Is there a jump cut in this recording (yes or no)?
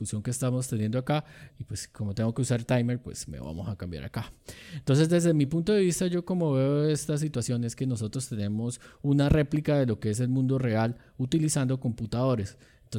yes